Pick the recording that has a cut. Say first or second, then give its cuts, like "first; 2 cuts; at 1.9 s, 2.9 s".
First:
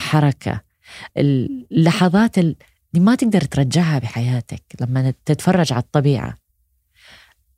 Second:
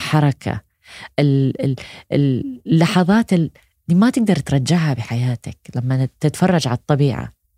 first; 1 cut; at 1.1 s